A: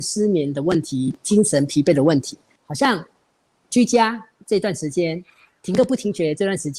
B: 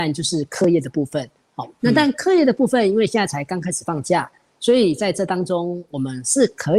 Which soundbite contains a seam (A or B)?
A